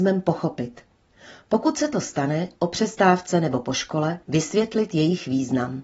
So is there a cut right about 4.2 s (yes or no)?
yes